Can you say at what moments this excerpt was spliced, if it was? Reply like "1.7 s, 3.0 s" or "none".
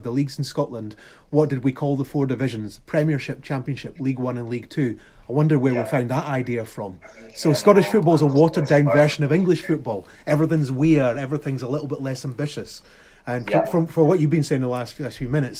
none

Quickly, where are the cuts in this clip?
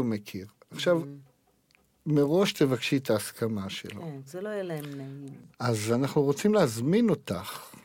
4.3 s, 5.5 s

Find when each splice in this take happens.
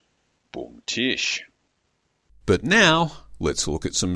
2.3 s

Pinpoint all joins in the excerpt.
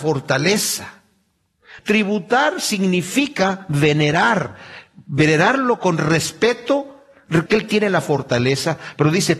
1.8 s, 7.5 s

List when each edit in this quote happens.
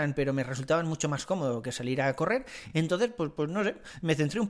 none

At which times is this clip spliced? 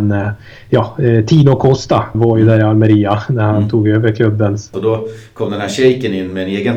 2.1 s, 4.7 s

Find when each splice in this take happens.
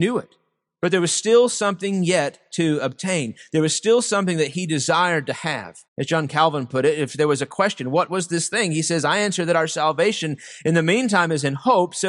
5.8 s

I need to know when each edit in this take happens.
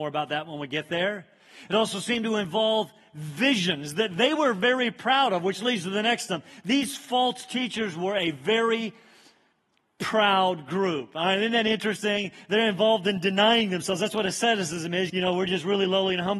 15.1 s

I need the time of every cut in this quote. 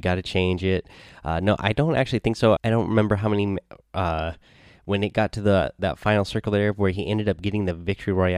2.6 s

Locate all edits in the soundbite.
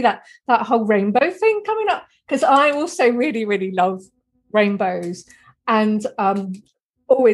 none

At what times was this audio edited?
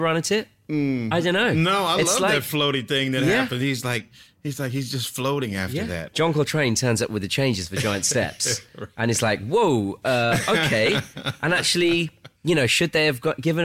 6.1 s, 12.4 s

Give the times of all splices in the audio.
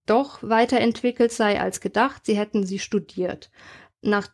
none

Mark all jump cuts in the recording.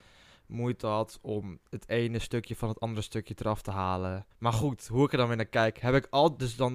4.3 s

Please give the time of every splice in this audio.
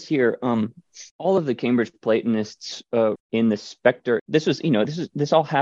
1.1 s, 3.2 s, 4.2 s

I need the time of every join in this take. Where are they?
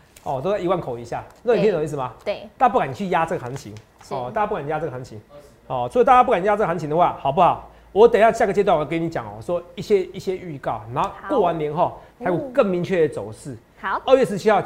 none

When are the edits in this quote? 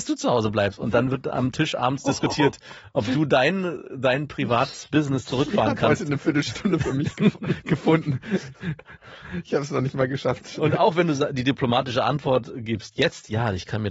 none

